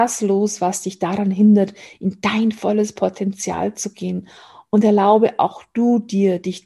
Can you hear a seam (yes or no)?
no